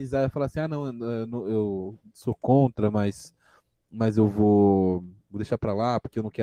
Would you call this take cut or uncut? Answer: uncut